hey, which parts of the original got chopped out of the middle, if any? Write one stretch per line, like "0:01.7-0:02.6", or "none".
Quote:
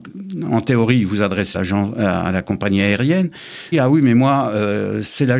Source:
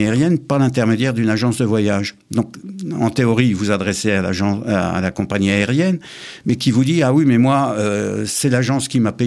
0:04.0-0:04.2
0:06.4-0:07.0